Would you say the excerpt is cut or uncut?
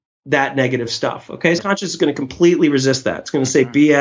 cut